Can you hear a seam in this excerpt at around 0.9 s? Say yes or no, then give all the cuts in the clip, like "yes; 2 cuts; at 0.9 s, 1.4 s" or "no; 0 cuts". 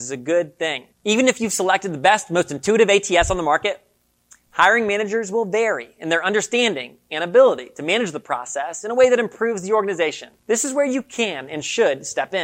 yes; 2 cuts; at 0.9 s, 10.4 s